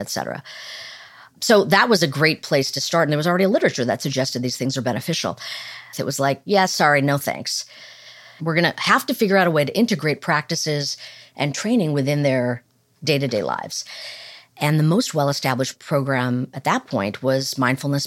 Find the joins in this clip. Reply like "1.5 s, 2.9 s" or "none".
5.9 s, 8.4 s

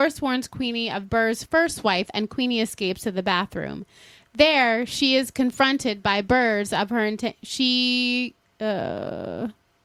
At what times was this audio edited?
2.1 s

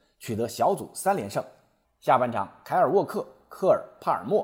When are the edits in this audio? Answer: 1.8 s

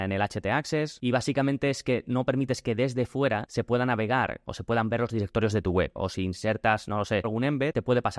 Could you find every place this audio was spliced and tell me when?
6.0 s, 7.2 s

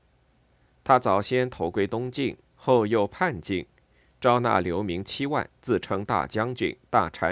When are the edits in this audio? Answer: none

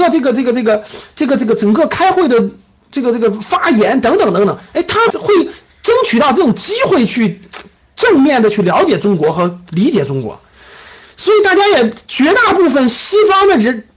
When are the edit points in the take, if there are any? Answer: 5.1 s

